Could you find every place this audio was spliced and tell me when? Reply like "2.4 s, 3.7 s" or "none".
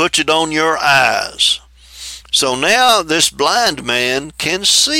2.2 s